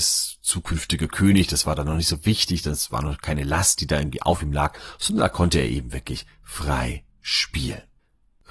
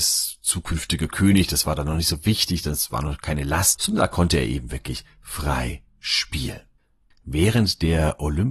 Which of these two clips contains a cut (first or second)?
second